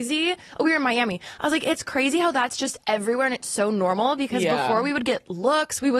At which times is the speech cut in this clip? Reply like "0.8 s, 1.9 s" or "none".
none